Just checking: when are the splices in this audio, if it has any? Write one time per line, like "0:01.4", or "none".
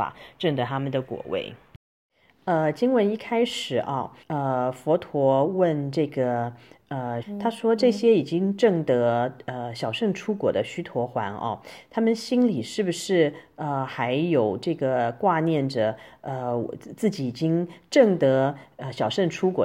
0:04.2
0:07.2